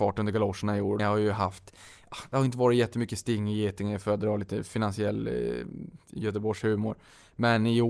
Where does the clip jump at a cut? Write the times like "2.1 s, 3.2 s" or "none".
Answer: 1.0 s